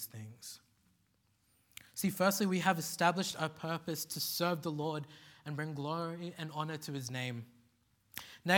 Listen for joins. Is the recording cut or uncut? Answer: uncut